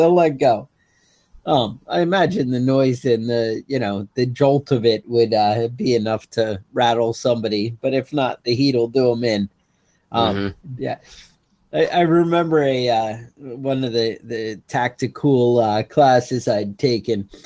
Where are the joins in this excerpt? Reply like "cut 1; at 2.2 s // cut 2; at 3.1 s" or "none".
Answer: cut 1; at 10.8 s